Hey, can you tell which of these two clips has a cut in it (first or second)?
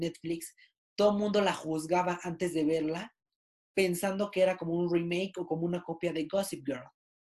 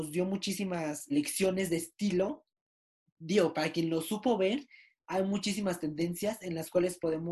second